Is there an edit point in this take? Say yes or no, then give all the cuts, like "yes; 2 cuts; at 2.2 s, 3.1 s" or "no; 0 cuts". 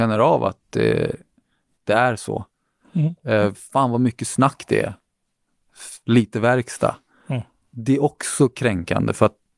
yes; 1 cut; at 3.5 s